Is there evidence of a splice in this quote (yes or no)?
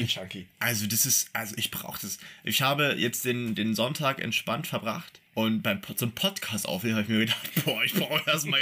yes